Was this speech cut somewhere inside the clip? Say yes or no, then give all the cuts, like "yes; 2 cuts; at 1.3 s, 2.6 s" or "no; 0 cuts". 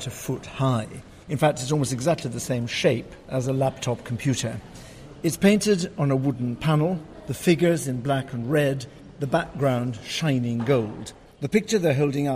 yes; 1 cut; at 11.3 s